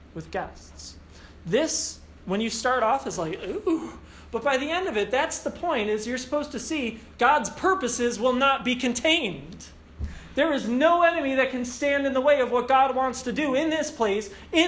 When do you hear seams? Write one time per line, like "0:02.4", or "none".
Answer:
none